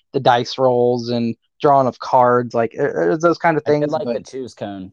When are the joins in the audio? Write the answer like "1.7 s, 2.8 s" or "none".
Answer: none